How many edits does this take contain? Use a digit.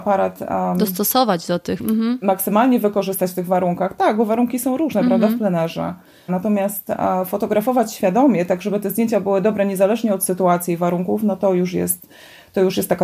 1